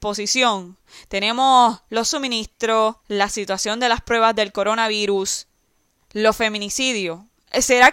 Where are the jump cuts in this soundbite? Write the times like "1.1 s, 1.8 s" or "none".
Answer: 3.0 s